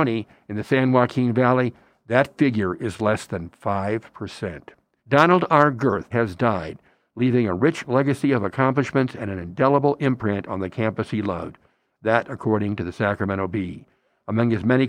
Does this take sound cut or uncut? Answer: cut